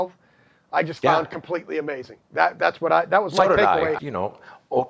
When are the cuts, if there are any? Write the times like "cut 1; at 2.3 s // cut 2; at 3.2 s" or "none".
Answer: cut 1; at 4.0 s

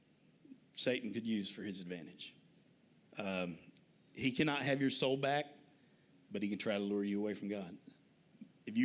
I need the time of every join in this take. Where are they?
cut 1; at 3.0 s

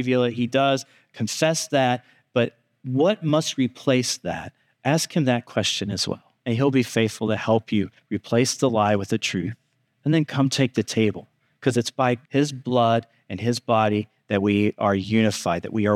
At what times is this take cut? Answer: cut 1; at 6.4 s // cut 2; at 9.9 s // cut 3; at 12.2 s

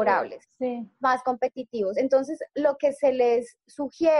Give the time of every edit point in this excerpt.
none

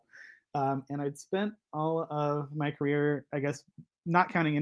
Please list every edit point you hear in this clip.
none

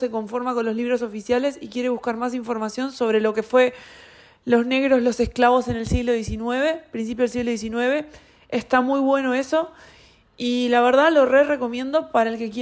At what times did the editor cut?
none

